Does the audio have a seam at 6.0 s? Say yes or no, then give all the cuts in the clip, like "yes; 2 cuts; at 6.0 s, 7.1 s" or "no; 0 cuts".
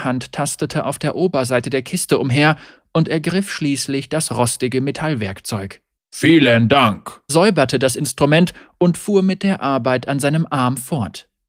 yes; 2 cuts; at 6.0 s, 7.3 s